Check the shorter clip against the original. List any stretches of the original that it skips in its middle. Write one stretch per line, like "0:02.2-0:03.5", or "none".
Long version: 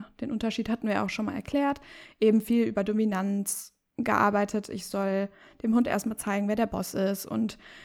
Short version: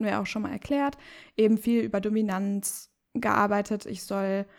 none